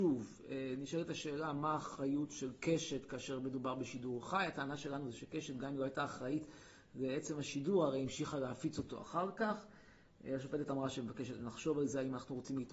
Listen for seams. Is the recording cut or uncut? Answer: uncut